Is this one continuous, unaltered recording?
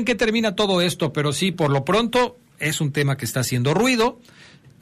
yes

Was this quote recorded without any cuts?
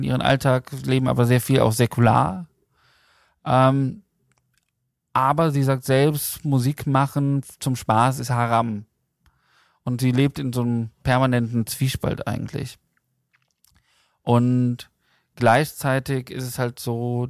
yes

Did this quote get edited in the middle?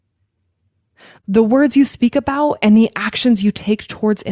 no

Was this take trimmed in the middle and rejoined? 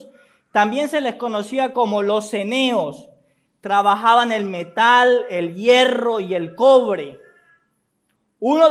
no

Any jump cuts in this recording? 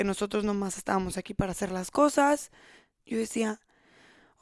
yes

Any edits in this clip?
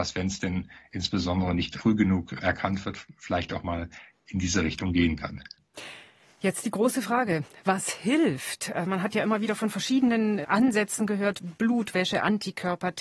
no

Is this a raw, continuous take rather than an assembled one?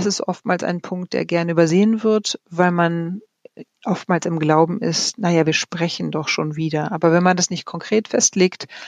yes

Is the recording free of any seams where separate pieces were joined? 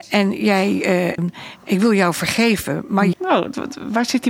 no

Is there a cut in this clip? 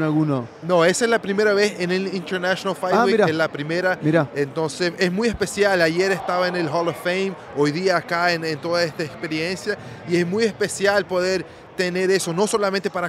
no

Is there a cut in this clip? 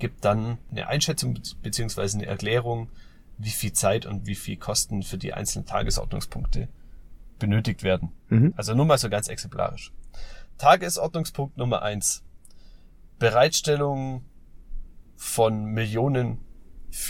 yes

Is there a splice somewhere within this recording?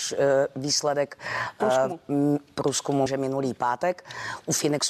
yes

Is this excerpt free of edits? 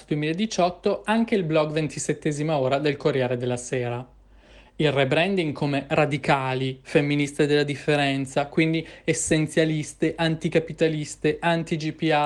yes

